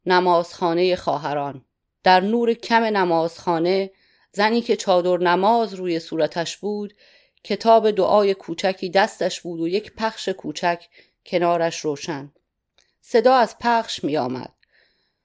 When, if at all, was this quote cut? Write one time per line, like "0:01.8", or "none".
0:01.9